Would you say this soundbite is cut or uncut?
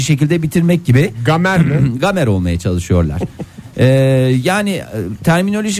uncut